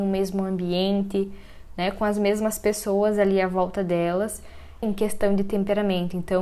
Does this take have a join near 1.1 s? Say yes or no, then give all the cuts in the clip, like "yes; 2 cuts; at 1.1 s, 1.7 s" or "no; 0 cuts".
no; 1 cut; at 4.8 s